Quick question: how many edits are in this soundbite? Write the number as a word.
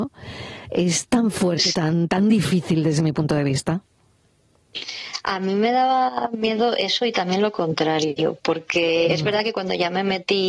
one